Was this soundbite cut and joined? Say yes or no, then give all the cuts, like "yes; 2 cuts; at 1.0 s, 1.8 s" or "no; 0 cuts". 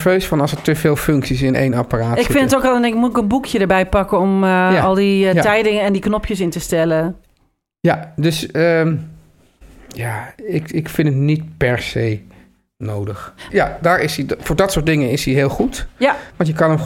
yes; 1 cut; at 13.5 s